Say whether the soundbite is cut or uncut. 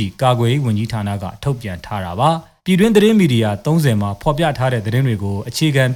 cut